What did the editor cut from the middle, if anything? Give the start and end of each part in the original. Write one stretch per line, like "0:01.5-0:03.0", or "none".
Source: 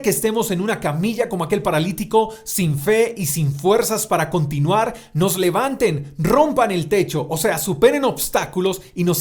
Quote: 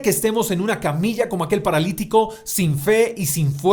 none